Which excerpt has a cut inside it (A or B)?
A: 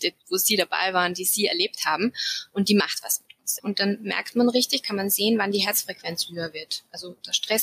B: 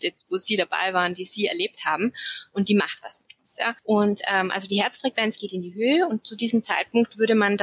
A